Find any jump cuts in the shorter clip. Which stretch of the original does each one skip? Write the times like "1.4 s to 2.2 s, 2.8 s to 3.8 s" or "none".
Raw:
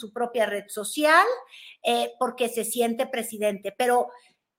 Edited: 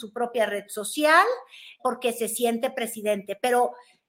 1.8 s to 2.2 s